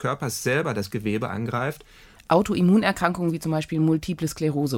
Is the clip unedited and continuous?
no; 1 cut; at 2.2 s

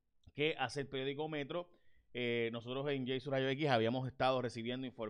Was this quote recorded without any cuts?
yes; 0 cuts

